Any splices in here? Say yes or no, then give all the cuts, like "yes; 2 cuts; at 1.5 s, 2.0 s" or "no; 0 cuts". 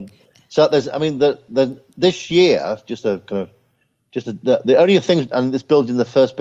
no; 0 cuts